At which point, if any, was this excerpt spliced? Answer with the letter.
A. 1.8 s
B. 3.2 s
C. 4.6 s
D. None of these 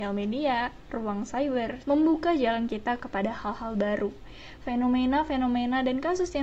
A